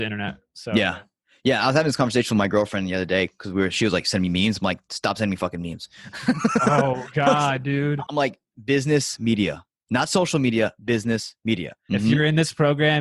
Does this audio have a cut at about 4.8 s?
no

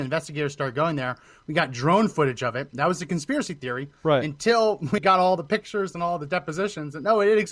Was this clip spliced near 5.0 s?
yes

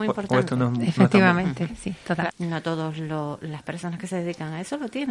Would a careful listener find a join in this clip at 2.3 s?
yes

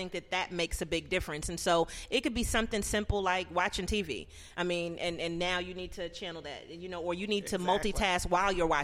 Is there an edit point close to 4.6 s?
no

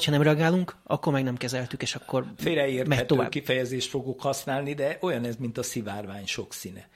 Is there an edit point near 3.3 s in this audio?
no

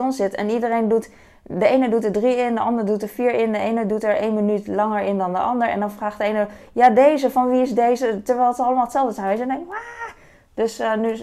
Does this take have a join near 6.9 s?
no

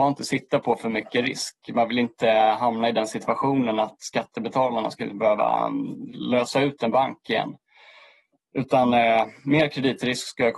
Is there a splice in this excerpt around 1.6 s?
no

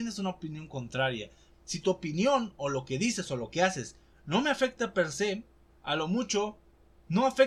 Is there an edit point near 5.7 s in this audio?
yes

